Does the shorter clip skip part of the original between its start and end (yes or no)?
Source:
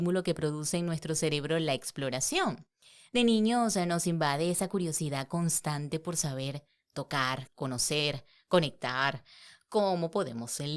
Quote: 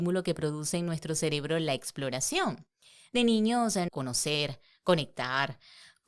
yes